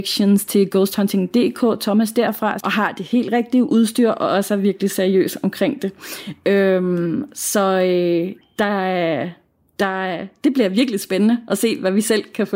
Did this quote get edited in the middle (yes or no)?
yes